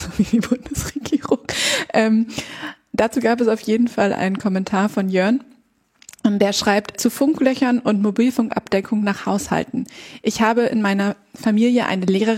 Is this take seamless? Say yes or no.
no